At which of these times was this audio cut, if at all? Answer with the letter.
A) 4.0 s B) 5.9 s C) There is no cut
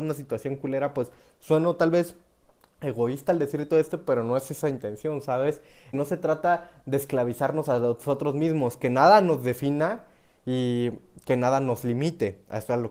B